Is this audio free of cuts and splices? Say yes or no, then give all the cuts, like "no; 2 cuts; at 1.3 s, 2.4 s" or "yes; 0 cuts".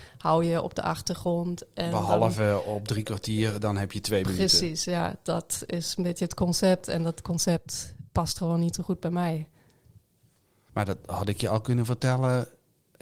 yes; 0 cuts